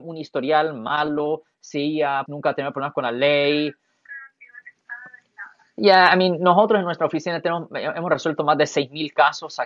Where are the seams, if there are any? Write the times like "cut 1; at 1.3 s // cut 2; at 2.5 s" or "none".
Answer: cut 1; at 2.3 s